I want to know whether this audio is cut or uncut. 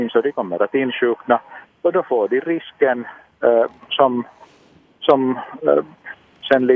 uncut